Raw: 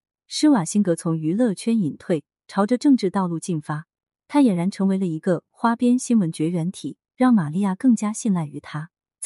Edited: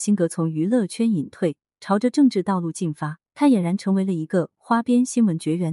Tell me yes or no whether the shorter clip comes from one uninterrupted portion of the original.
no